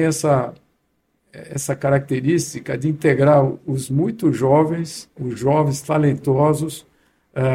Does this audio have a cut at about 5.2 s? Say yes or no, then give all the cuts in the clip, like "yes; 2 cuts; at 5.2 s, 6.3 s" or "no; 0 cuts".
yes; 1 cut; at 5.2 s